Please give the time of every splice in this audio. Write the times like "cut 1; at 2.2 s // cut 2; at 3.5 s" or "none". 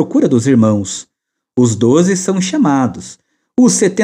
none